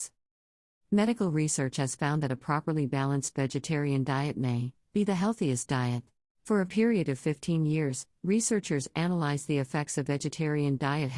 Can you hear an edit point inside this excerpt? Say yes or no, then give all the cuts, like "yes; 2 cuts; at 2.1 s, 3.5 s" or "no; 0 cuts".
yes; 2 cuts; at 4.9 s, 6.3 s